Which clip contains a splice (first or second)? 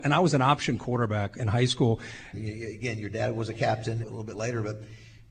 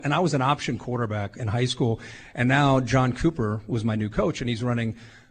first